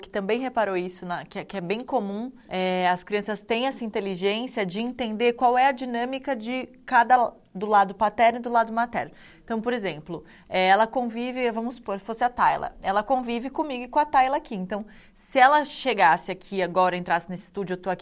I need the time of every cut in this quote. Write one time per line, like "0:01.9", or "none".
none